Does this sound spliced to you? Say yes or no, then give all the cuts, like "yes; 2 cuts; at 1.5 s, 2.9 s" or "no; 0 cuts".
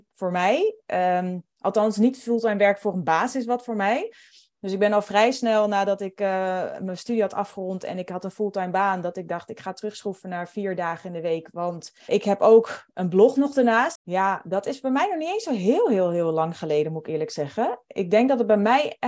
yes; 2 cuts; at 12.1 s, 14.0 s